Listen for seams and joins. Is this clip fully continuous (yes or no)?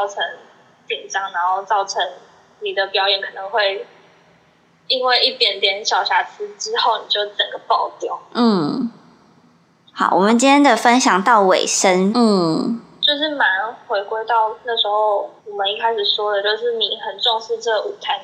no